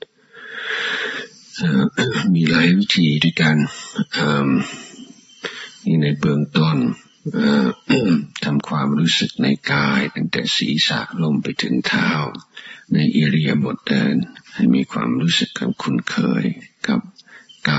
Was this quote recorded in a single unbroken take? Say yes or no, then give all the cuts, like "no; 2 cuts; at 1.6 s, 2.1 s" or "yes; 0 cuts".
no; 1 cut; at 14.5 s